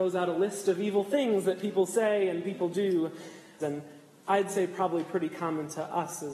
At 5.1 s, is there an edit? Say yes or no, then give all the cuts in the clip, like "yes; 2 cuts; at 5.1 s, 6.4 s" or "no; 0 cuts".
no; 1 cut; at 3.6 s